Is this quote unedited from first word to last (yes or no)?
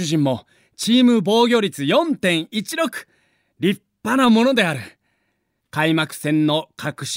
no